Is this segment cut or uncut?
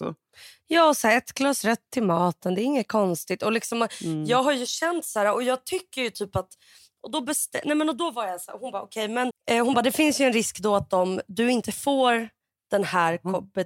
cut